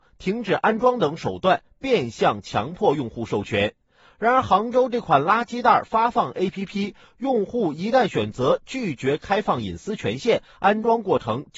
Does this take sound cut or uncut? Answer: uncut